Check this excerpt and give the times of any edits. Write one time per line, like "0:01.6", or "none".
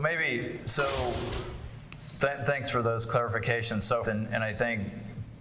0:04.1